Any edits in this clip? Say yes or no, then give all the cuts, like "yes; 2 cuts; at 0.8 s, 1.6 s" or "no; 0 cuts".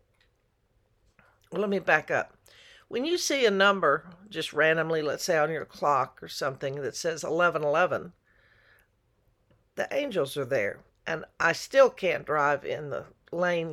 yes; 1 cut; at 10.9 s